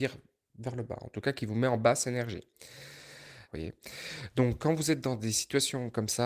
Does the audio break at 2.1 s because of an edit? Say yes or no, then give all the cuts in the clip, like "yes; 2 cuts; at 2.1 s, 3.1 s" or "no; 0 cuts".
no; 1 cut; at 3.5 s